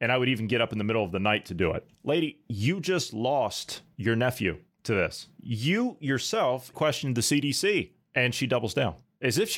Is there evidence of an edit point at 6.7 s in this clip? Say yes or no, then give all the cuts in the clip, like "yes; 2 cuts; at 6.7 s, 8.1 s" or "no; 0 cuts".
yes; 1 cut; at 6.7 s